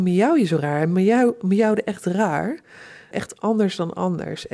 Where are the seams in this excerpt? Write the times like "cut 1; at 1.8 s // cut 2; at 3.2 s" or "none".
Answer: cut 1; at 3.1 s